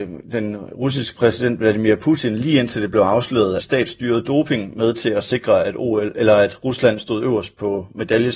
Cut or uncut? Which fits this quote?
cut